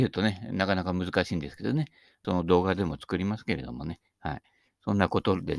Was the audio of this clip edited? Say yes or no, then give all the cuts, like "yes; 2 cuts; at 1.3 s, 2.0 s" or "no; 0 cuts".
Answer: yes; 1 cut; at 2.2 s